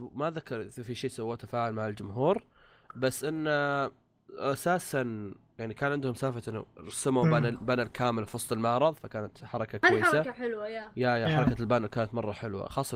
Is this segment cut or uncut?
uncut